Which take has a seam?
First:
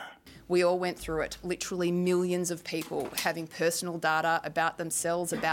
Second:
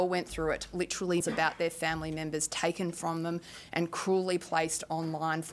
second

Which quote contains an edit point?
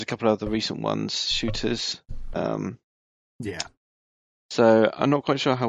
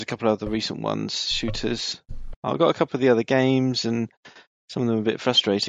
second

